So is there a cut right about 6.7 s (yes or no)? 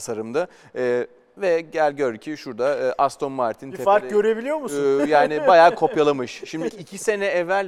yes